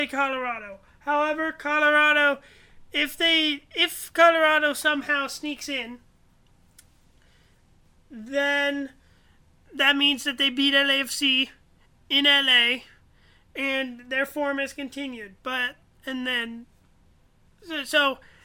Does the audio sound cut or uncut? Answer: uncut